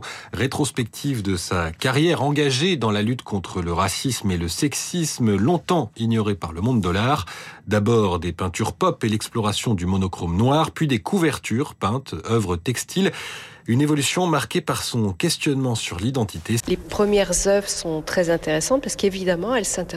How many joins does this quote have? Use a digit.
1